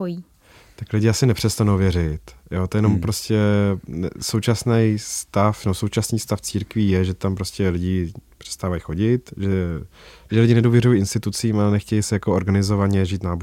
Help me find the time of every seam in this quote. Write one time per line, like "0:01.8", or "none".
none